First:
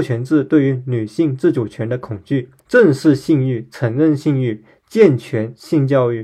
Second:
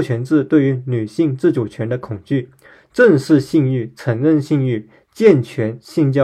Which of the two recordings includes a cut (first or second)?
first